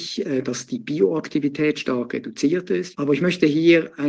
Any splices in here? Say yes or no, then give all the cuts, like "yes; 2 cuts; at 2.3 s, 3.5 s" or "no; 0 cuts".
yes; 1 cut; at 2.9 s